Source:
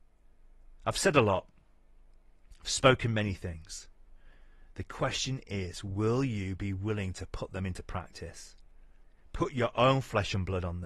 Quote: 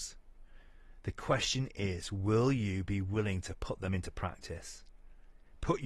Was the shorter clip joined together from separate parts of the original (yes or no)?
no